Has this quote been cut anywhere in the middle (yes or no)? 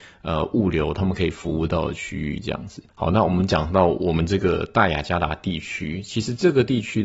yes